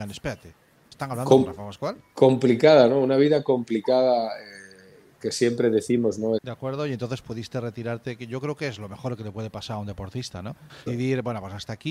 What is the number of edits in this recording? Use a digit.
2